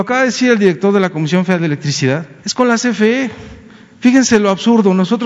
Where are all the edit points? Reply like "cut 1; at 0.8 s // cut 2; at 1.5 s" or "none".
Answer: cut 1; at 2.4 s